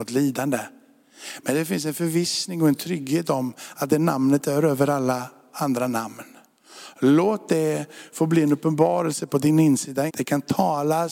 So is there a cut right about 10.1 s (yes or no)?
yes